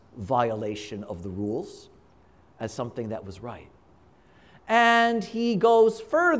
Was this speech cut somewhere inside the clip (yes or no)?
no